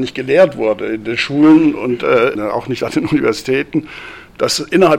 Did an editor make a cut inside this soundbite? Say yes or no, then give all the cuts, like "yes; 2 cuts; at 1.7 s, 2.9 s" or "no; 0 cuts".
yes; 1 cut; at 2.4 s